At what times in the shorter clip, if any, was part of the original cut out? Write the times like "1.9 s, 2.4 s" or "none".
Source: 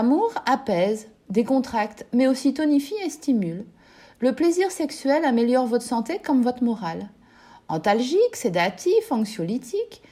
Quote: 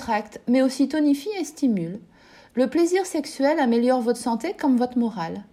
none